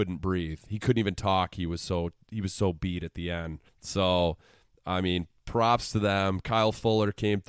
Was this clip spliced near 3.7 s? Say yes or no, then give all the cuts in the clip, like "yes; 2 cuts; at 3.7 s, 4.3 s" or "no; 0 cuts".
yes; 1 cut; at 3.7 s